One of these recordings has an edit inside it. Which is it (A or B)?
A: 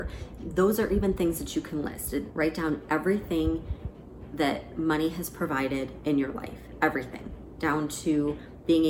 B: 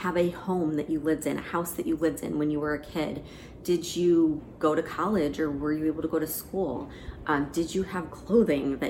A